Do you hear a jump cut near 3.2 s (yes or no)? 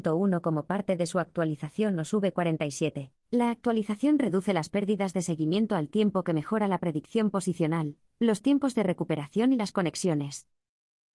yes